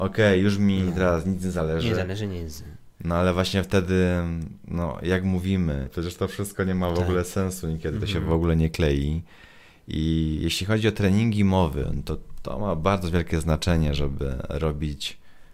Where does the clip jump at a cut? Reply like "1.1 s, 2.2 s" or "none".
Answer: 5.9 s